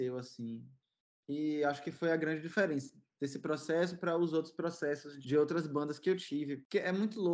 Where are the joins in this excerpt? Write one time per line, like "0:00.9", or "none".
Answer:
0:05.2